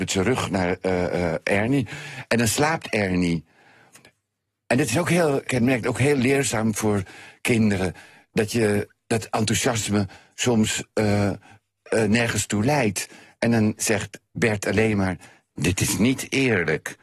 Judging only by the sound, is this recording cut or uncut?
cut